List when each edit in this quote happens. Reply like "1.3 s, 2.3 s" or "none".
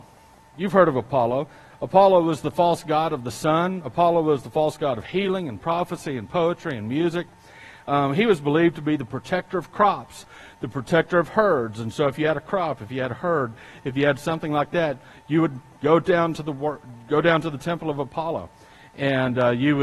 none